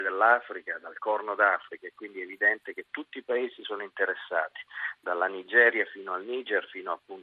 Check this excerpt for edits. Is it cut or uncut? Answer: uncut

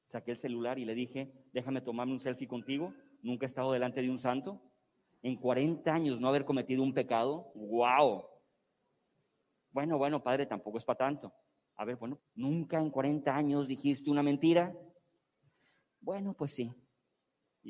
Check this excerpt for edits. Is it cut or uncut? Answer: cut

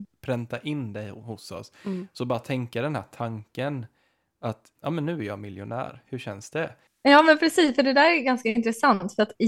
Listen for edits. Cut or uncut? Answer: cut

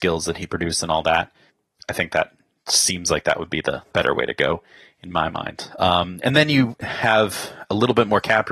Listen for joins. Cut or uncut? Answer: uncut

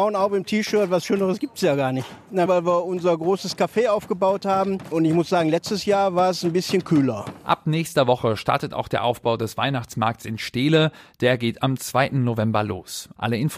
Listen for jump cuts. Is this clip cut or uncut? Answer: cut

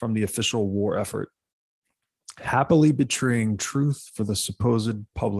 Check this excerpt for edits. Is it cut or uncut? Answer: uncut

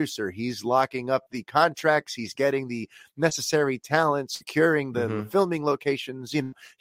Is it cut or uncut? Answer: uncut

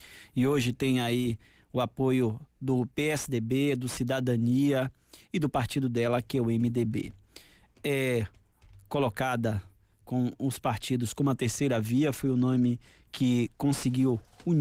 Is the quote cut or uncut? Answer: uncut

